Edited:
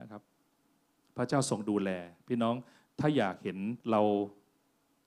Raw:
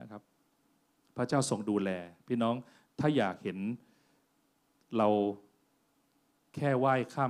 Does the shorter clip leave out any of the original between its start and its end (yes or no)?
yes